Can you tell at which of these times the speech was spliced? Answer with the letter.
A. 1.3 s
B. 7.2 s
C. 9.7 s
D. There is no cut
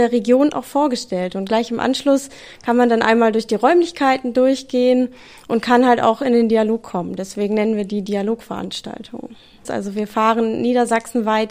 C